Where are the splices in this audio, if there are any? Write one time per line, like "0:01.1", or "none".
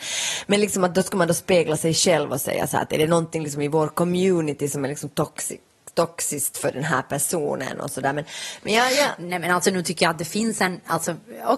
none